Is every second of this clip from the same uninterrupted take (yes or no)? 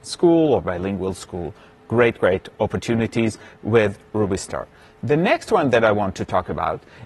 yes